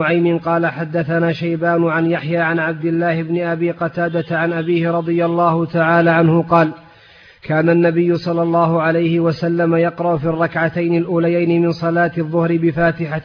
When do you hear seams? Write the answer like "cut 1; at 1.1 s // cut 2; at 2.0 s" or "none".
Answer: none